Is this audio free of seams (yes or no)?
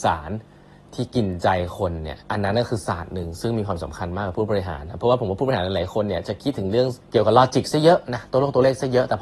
no